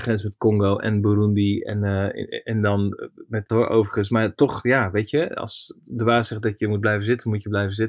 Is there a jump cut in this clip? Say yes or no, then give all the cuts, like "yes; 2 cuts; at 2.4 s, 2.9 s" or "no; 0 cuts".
yes; 1 cut; at 3.5 s